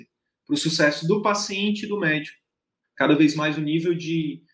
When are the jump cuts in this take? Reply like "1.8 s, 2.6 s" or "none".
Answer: 2.8 s